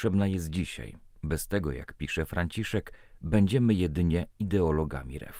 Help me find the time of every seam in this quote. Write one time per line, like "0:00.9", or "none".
0:01.2